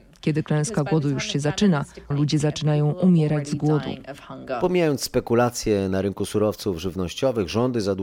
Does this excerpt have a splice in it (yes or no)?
yes